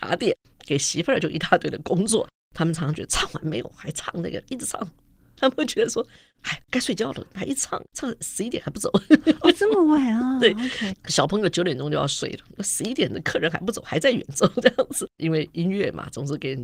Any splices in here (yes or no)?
yes